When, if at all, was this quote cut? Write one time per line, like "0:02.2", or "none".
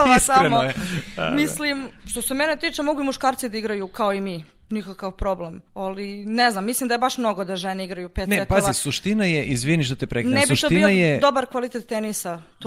0:05.7